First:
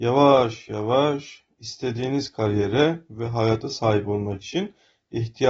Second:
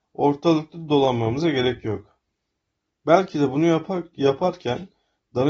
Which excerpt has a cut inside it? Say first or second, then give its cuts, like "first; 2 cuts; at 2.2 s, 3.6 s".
second; 1 cut; at 2.9 s